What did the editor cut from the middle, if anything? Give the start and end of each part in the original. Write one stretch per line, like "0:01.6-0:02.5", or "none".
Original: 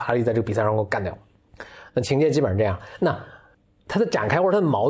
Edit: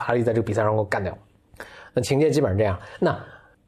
none